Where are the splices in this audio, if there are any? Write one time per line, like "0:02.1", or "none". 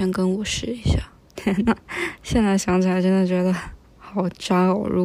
none